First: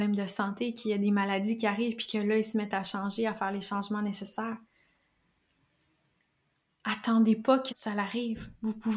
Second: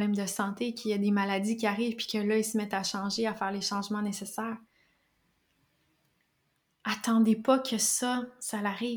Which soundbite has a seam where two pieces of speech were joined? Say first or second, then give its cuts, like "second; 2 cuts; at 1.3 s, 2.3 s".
first; 1 cut; at 7.7 s